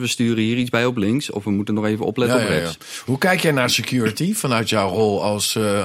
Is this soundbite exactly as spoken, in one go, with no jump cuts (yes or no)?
yes